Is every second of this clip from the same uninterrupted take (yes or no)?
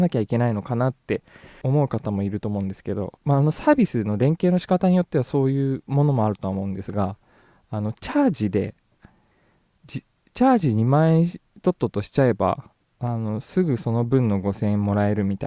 no